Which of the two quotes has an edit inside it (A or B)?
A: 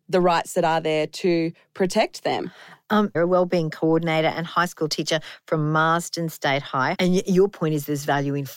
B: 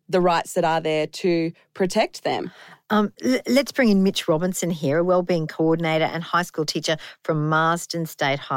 A